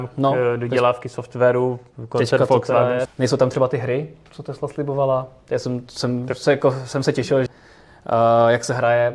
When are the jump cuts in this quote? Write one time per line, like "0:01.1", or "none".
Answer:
0:03.1
0:07.5

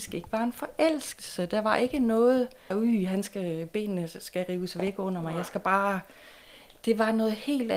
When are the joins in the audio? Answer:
0:02.7

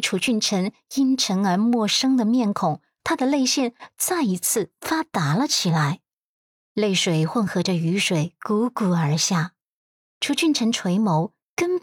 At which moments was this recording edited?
none

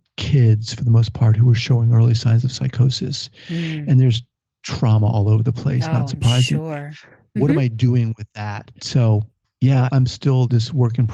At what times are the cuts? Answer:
0:07.4

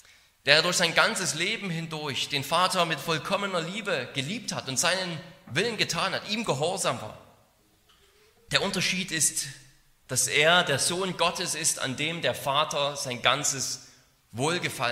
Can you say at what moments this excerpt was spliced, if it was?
0:08.5

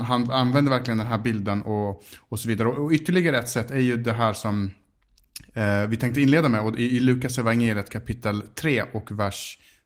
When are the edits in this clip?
none

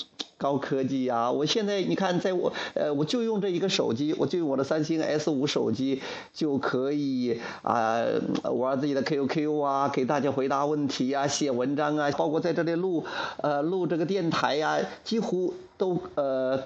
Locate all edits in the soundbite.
0:12.1

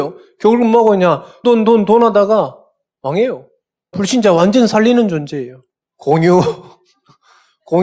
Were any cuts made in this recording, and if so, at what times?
0:01.4
0:03.9
0:05.9

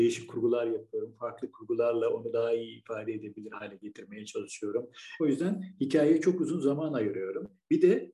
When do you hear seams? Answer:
0:05.2

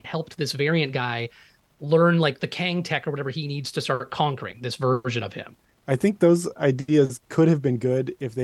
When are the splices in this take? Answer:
0:05.7

